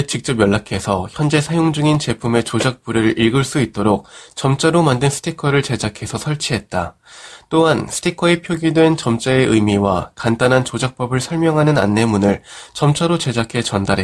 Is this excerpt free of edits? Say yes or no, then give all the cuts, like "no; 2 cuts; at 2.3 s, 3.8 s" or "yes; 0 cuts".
yes; 0 cuts